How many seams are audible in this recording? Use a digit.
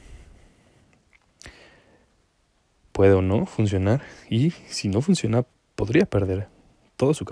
0